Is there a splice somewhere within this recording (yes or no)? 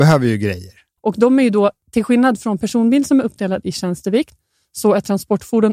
yes